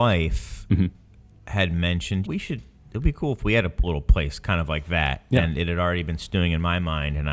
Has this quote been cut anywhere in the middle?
yes; 1 cut; at 2.2 s

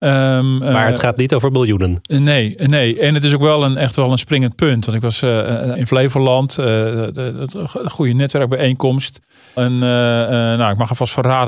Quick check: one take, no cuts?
no; 2 cuts; at 5.7 s, 9.6 s

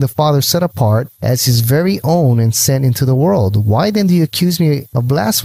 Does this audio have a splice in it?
no; 0 cuts

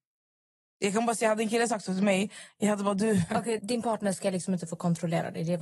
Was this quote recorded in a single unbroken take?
no; 1 cut; at 3.6 s

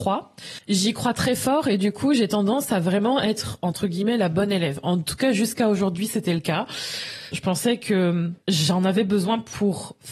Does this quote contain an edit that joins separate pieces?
yes; 2 cuts; at 7.3 s, 8.4 s

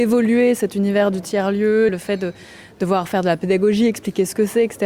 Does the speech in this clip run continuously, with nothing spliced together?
no; 1 cut; at 1.9 s

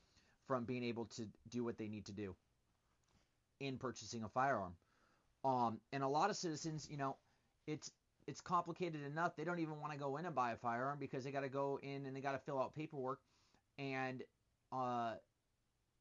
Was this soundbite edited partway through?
no; 0 cuts

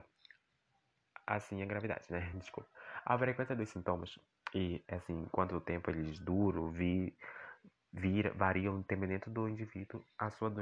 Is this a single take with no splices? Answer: yes; 0 cuts

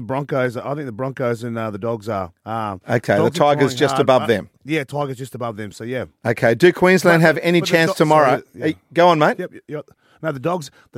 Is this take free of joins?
no; 1 cut; at 4.6 s

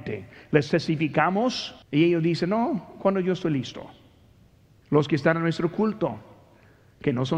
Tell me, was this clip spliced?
yes; 2 cuts; at 1.8 s, 4.8 s

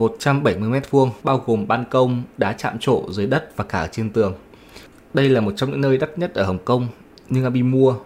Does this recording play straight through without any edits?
no; 1 cut; at 1.2 s

